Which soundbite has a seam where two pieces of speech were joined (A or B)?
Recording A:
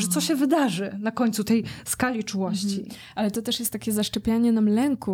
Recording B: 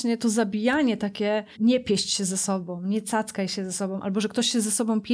B